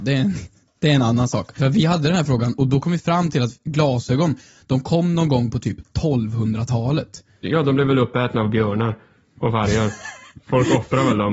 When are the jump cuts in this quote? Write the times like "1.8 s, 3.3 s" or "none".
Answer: 1.6 s, 7.4 s